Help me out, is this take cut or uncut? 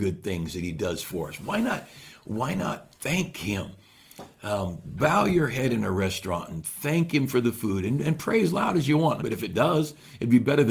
cut